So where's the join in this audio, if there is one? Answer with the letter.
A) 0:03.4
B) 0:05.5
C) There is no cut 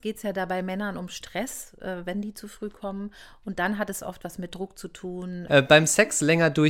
B